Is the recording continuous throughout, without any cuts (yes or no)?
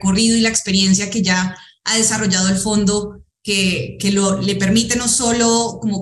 no